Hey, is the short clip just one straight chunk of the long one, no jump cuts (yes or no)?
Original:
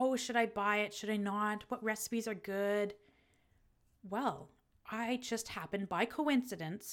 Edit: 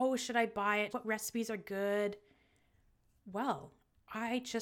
no